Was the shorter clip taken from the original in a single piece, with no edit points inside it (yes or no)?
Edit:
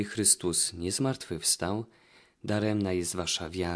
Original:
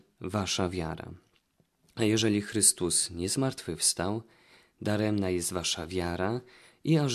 yes